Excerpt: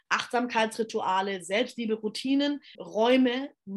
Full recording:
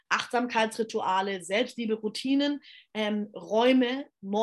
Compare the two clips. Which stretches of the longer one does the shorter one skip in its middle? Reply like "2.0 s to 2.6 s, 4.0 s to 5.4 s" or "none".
2.7 s to 3.3 s